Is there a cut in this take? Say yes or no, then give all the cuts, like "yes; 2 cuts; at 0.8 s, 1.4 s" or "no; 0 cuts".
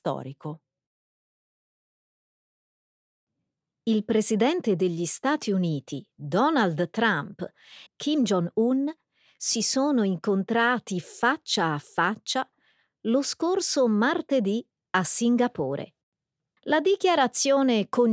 yes; 2 cuts; at 7.9 s, 16.6 s